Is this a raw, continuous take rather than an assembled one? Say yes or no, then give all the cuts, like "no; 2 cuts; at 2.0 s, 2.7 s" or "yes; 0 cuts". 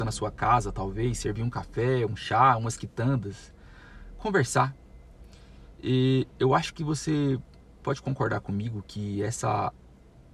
yes; 0 cuts